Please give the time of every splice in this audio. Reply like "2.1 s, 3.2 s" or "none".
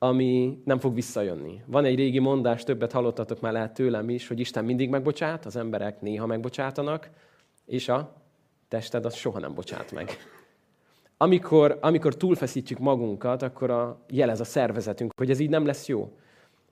none